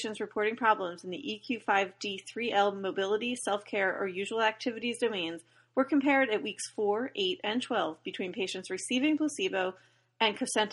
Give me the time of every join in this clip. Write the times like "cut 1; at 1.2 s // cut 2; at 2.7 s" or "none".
none